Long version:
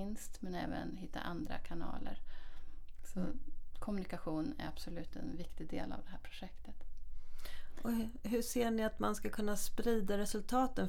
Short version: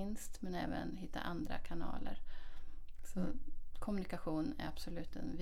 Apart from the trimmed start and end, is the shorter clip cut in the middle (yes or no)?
no